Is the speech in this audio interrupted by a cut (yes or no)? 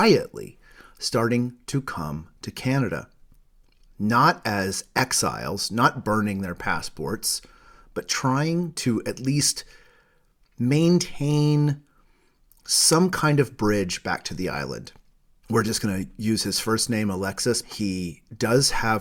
yes